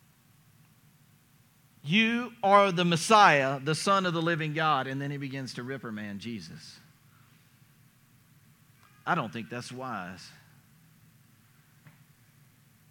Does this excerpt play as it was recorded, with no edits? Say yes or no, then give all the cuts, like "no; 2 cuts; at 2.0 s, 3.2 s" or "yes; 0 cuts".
yes; 0 cuts